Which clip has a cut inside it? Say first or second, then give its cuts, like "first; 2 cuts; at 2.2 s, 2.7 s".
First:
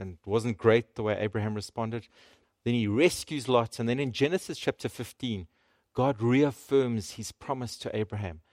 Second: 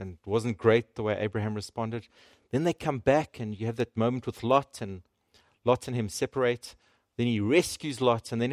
first; 1 cut; at 2.4 s